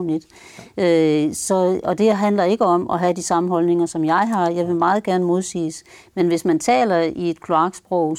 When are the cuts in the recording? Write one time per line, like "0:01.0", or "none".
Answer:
none